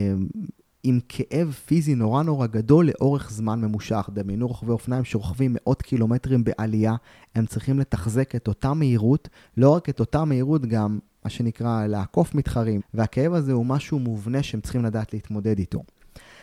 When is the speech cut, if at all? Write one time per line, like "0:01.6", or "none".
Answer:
0:12.8